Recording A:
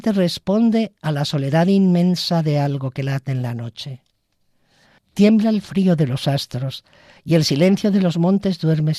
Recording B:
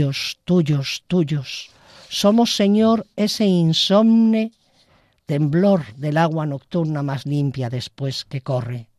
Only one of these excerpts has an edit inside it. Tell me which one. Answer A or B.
A